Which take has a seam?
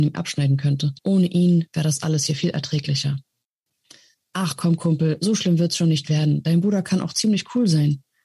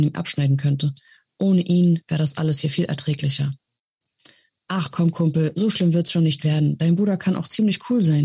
first; 1 cut; at 1.0 s

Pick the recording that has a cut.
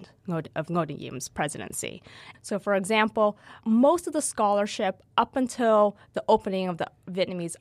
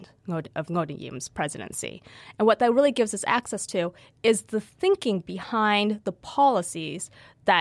first; 2 cuts; at 2.3 s, 3.6 s

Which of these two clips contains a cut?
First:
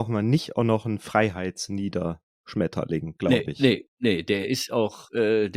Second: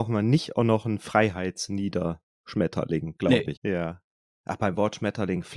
second; 1 cut; at 3.6 s

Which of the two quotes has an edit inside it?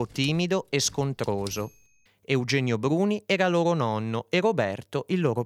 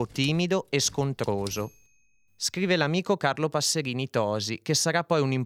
first; 1 cut; at 2.1 s

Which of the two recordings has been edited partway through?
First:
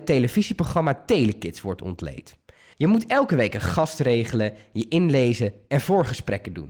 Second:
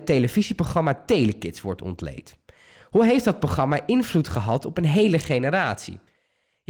first; 1 cut; at 2.7 s

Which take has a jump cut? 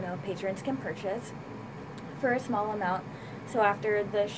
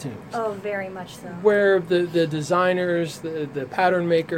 first; 1 cut; at 3.4 s

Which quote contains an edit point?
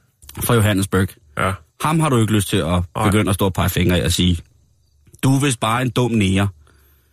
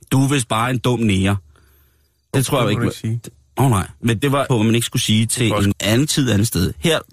second; 2 cuts; at 4.5 s, 5.7 s

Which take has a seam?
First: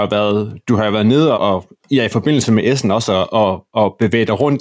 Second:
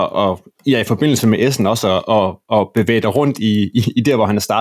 first; 1 cut; at 1.3 s

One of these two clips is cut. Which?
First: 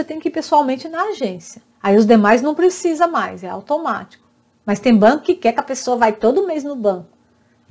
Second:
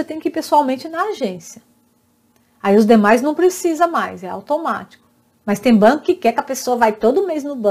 first; 1 cut; at 1.7 s

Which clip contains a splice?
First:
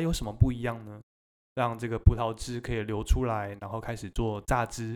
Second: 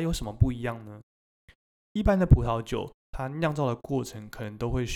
first; 1 cut; at 1.4 s

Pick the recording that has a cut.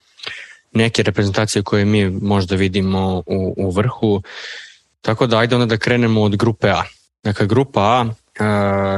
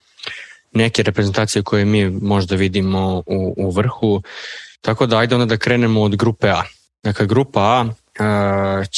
second; 1 cut; at 4.7 s

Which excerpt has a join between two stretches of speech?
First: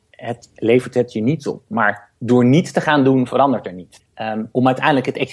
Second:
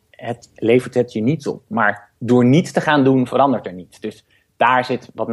first; 1 cut; at 4.0 s

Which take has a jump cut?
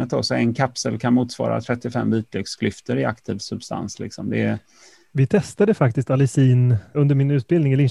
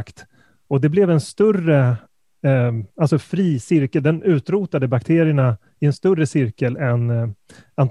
first; 1 cut; at 6.9 s

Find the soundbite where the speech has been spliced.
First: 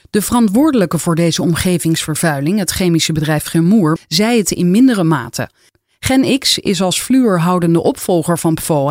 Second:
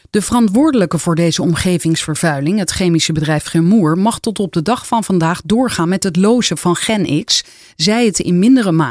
first; 1 cut; at 4.0 s

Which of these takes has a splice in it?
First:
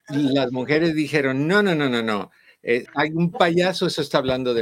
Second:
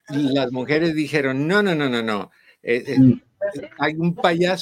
first; 1 cut; at 2.9 s

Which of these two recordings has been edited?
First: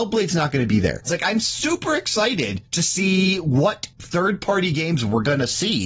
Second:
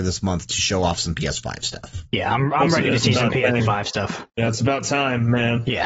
first; 1 cut; at 1.1 s

